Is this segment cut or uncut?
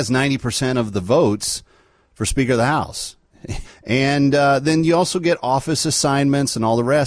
cut